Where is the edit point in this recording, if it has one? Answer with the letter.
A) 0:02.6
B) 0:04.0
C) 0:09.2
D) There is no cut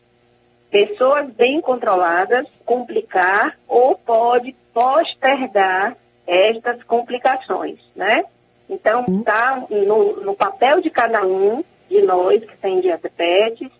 A